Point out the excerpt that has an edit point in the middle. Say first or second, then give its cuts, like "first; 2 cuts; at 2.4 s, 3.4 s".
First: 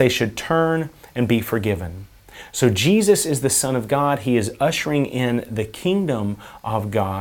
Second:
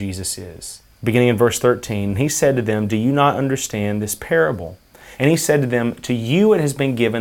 second; 2 cuts; at 0.9 s, 5.1 s